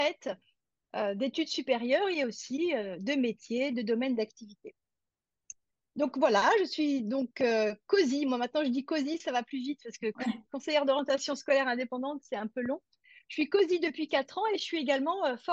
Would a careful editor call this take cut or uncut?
uncut